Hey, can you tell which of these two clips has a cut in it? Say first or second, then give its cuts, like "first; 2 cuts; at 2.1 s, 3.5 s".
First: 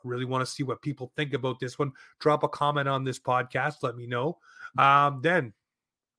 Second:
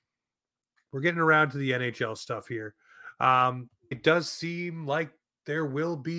second; 1 cut; at 3.9 s